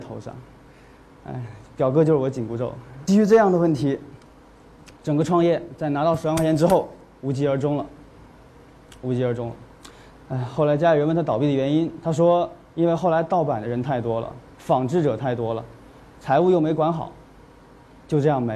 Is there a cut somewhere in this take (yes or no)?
yes